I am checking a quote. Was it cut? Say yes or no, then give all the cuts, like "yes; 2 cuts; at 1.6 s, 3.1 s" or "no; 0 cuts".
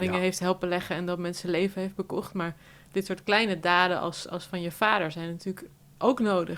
no; 0 cuts